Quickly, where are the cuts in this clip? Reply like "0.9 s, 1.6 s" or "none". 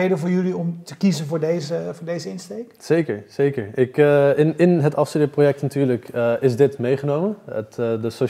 none

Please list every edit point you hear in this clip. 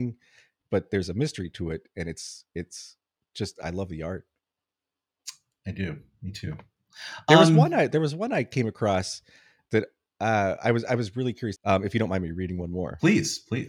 11.6 s

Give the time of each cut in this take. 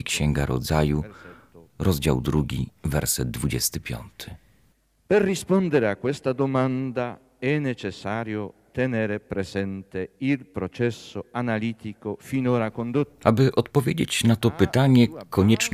none

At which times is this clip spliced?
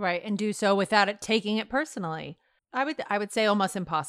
2.6 s

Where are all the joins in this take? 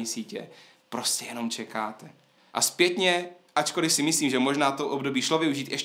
2.4 s

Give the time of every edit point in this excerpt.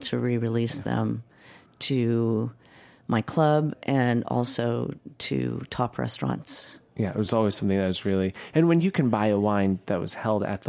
none

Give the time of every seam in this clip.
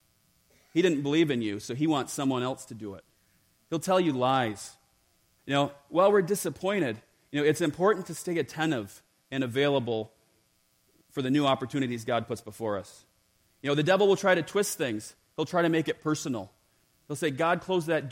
5.4 s

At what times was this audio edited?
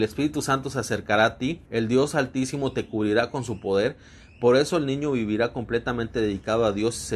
1.6 s

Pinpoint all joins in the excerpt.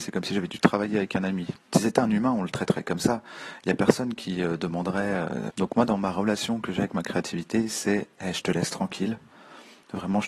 1.6 s, 5.5 s

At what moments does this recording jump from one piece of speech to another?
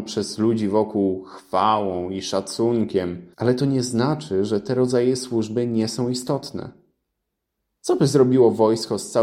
3.3 s

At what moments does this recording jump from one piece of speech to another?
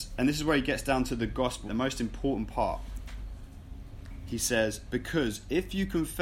1.7 s

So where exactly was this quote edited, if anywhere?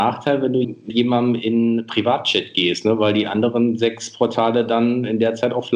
none

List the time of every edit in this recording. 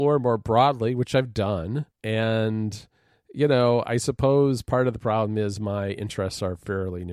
1.9 s

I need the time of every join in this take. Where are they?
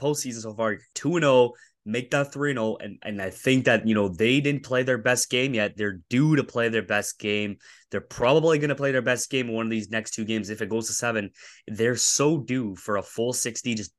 none

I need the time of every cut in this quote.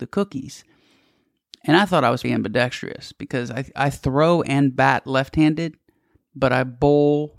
2.2 s

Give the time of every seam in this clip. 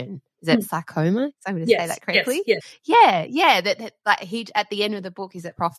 none

